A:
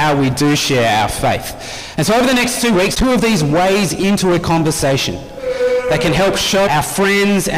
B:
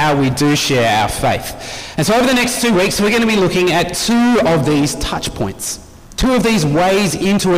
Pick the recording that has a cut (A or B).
A